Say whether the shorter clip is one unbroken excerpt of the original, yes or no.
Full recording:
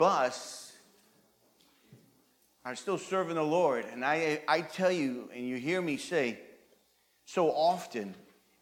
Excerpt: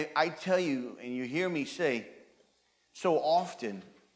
yes